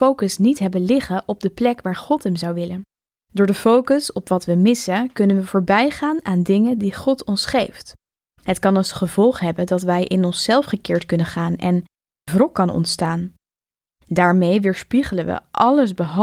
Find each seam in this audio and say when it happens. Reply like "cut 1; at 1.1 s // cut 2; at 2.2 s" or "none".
cut 1; at 12.3 s